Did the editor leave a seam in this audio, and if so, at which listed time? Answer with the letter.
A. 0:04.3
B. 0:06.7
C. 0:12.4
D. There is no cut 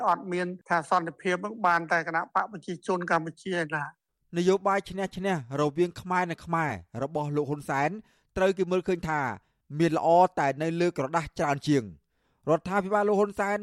D